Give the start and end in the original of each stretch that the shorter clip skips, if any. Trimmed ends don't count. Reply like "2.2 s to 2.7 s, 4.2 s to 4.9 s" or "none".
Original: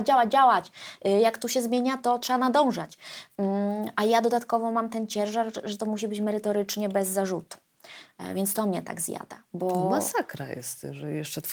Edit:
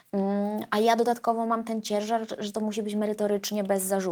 none